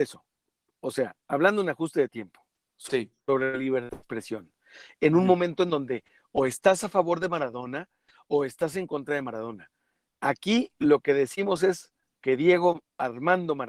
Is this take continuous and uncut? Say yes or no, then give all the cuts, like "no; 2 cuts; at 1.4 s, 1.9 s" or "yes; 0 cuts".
yes; 0 cuts